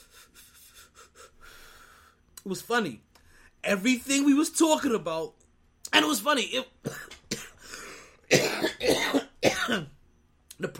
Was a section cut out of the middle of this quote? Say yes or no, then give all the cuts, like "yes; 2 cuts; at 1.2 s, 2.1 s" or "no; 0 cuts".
no; 0 cuts